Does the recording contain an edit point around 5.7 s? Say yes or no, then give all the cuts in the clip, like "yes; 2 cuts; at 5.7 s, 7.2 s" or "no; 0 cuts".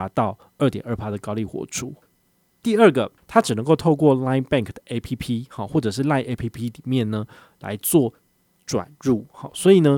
no; 0 cuts